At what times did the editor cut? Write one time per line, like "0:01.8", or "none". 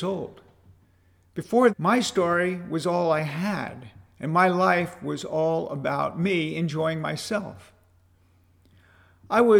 0:01.7